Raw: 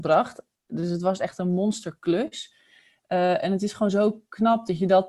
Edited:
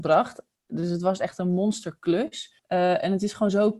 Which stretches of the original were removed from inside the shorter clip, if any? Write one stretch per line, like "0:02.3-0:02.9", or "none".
0:02.6-0:03.0